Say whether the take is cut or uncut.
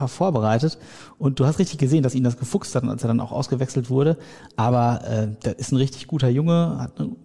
uncut